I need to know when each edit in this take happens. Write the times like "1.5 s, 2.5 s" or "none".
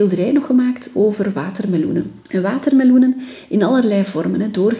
2.2 s